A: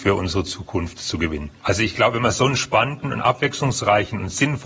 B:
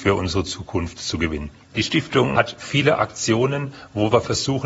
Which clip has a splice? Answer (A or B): A